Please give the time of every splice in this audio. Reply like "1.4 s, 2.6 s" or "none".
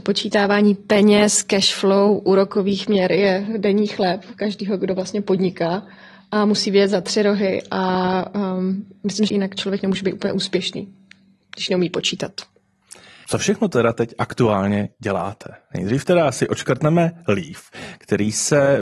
9.3 s, 13.2 s